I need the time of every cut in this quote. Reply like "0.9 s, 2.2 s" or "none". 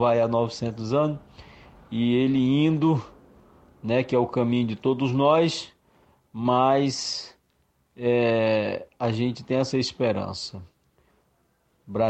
none